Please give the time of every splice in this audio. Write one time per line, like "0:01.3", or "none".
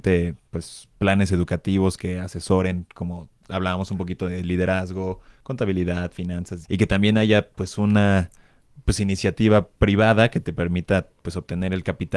0:06.6